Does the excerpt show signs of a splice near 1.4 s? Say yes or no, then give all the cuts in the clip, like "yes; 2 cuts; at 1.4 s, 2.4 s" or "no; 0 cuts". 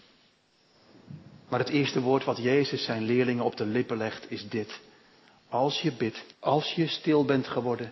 no; 1 cut; at 6.3 s